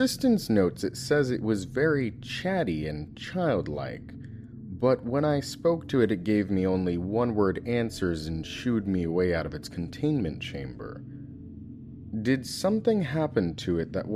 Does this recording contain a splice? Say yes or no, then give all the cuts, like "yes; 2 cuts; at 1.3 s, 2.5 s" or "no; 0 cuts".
no; 0 cuts